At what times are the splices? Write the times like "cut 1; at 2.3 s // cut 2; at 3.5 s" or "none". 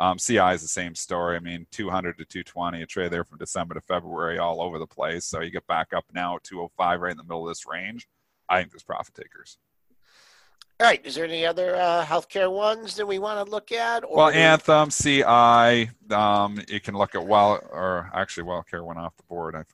none